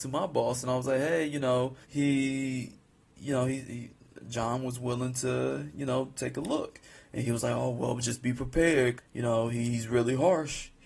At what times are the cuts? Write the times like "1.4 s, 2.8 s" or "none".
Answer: 1.8 s, 9.0 s